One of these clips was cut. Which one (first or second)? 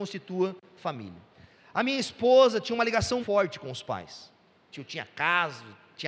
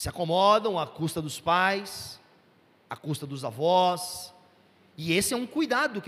first